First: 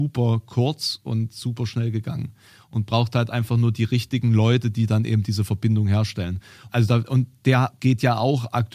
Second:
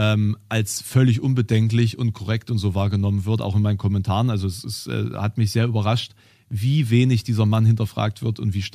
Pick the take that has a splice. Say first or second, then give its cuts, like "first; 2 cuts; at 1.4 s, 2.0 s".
first; 1 cut; at 6.7 s